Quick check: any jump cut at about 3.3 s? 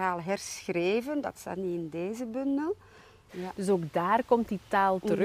yes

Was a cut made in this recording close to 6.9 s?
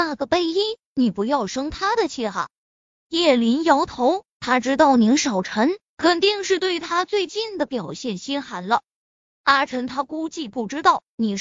no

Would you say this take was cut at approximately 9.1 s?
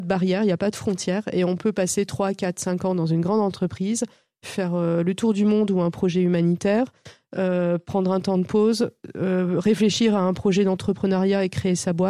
no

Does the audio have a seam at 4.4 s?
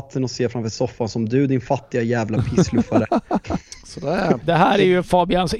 yes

